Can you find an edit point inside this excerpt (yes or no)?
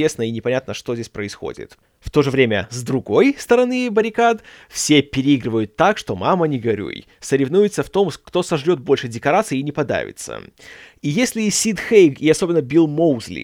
no